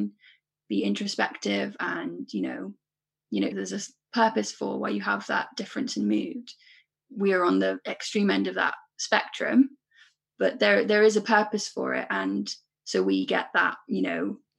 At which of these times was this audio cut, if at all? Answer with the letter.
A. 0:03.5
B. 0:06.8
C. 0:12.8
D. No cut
A